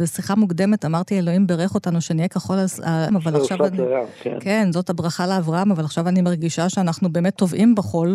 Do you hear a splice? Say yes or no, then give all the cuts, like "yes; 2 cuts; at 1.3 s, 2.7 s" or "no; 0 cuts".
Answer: yes; 1 cut; at 3.1 s